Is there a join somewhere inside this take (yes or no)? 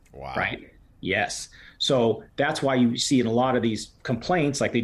no